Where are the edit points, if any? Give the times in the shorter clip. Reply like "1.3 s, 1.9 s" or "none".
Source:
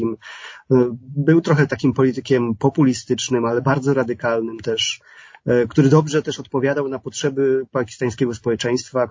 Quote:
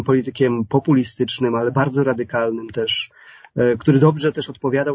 none